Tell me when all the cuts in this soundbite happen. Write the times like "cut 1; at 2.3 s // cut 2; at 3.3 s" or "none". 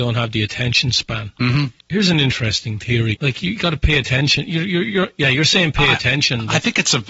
cut 1; at 1.8 s // cut 2; at 3.1 s